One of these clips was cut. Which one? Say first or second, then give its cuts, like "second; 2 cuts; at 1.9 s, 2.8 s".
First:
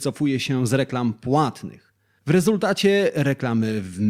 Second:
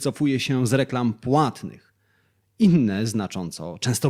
first; 1 cut; at 2.2 s